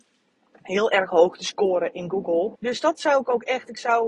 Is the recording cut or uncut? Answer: cut